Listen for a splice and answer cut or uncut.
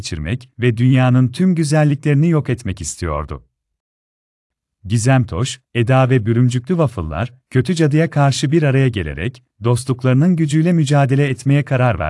uncut